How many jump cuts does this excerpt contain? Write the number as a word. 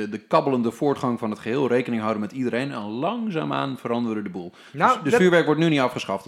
zero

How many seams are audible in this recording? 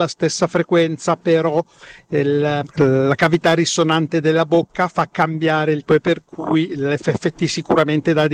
two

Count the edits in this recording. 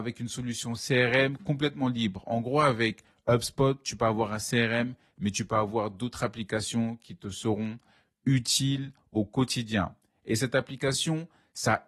zero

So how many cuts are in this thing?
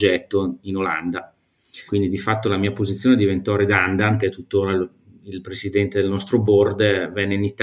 two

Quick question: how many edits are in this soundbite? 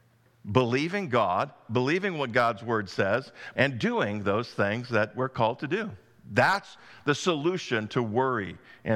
one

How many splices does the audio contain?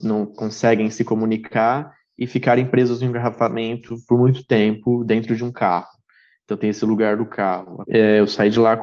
one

